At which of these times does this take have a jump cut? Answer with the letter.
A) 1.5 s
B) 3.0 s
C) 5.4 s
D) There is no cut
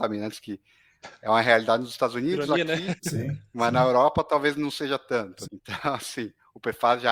C